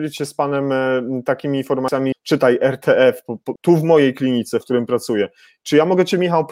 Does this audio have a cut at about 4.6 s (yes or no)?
yes